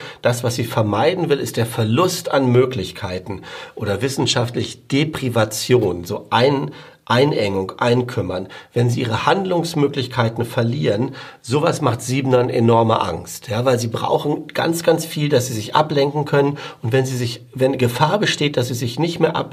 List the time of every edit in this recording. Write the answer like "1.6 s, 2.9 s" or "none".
none